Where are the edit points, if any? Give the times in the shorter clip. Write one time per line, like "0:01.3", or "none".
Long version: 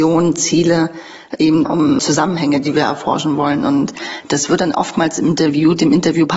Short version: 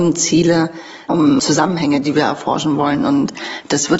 0:01.1